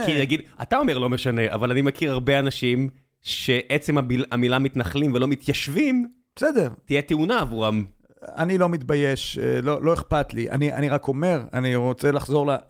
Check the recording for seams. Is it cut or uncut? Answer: uncut